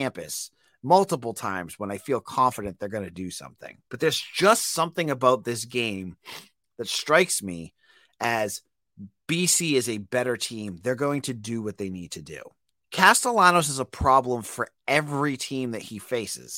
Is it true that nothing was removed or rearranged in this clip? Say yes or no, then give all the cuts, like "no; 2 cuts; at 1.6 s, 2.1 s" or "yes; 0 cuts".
no; 2 cuts; at 3.8 s, 12.8 s